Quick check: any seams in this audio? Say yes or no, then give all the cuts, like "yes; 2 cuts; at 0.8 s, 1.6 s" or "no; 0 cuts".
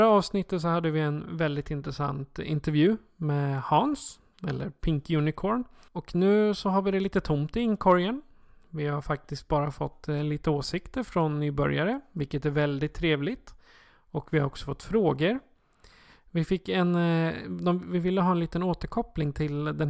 yes; 1 cut; at 5.9 s